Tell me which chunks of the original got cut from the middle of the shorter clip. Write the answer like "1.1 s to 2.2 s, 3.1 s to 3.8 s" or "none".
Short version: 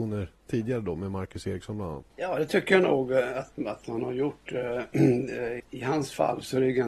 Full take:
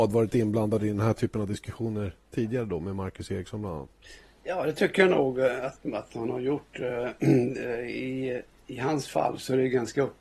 3.9 s to 4.4 s, 7.9 s to 8.6 s